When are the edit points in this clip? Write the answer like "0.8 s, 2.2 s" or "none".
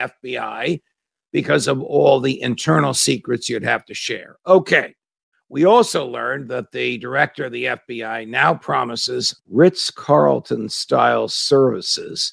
5.3 s, 9.4 s